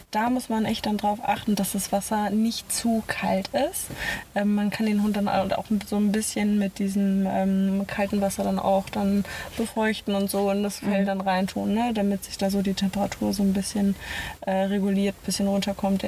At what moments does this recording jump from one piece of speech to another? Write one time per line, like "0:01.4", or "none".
none